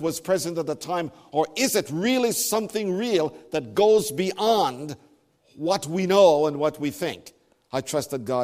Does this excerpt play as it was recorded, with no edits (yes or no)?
yes